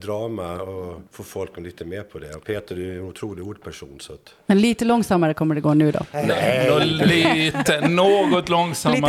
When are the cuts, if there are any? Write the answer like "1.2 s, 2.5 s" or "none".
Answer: 1.1 s